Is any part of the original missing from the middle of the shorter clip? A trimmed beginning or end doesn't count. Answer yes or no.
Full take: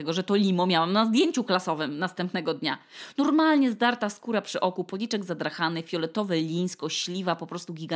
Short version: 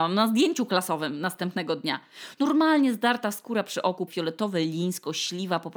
yes